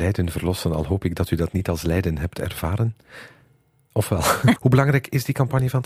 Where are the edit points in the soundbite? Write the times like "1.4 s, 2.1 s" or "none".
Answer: 4.6 s